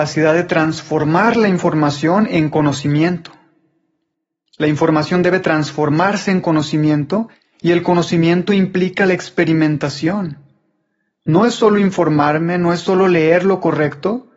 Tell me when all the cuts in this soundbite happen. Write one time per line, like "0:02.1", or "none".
none